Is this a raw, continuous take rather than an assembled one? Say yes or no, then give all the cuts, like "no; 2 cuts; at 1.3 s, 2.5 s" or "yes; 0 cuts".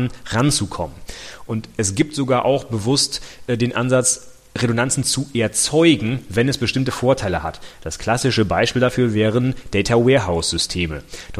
no; 1 cut; at 1.5 s